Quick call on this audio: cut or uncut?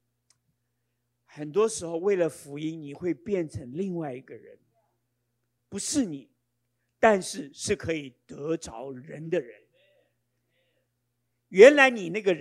uncut